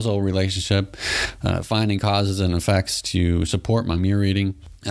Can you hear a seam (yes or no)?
no